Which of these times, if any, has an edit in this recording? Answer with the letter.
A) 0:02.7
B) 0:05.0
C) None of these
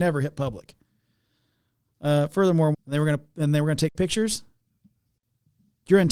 A